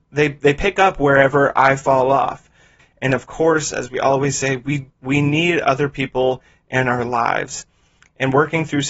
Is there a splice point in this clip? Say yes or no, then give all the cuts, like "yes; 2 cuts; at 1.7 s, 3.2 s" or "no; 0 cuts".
yes; 2 cuts; at 2.8 s, 5.0 s